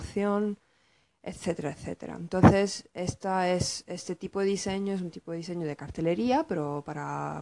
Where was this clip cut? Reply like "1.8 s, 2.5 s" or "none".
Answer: none